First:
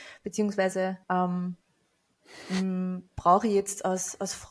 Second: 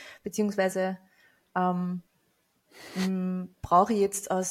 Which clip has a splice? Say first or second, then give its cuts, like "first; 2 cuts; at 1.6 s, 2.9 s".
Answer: first; 1 cut; at 1.0 s